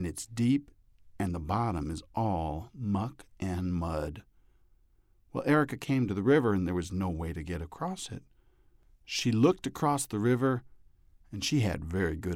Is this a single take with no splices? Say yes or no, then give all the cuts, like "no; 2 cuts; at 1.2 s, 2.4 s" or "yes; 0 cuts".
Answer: yes; 0 cuts